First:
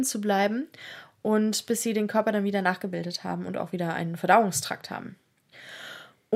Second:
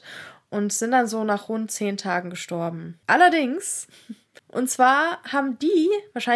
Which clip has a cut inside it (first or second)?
second